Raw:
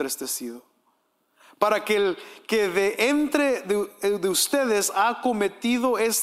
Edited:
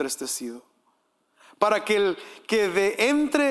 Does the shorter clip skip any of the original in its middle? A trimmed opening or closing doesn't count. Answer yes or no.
no